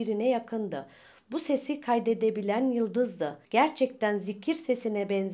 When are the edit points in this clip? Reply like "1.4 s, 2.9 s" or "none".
3.4 s